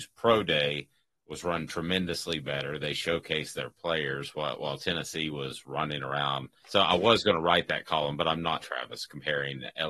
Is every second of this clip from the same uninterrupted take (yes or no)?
no